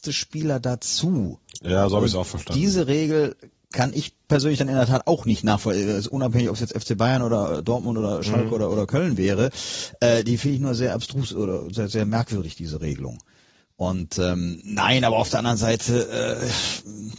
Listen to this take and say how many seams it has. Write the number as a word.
zero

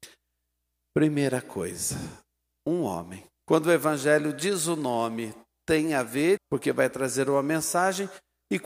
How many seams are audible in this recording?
two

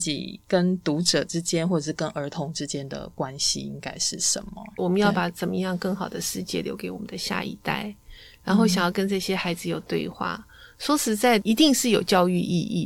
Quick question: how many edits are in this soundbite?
one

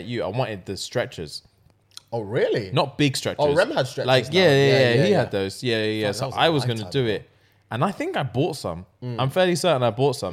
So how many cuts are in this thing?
zero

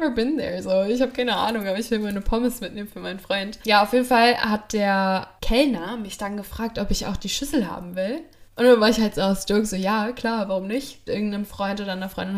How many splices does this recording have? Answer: two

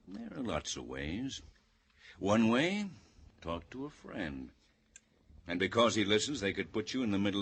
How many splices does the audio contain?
two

